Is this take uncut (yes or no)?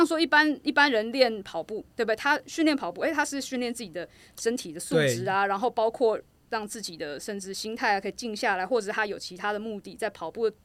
yes